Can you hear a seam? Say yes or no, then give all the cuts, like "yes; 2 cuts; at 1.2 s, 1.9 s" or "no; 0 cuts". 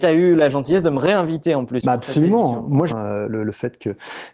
yes; 1 cut; at 2.9 s